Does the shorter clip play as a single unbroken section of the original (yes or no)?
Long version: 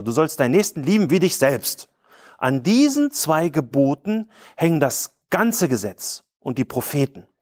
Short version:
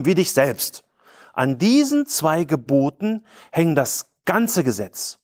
yes